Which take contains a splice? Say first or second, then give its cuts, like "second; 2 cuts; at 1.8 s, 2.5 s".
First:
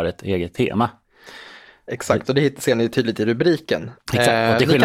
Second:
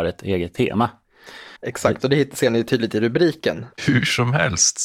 second; 2 cuts; at 1.6 s, 3.8 s